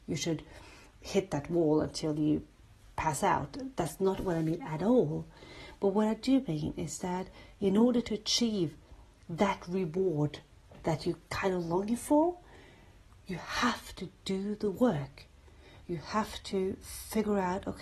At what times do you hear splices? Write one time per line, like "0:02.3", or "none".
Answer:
none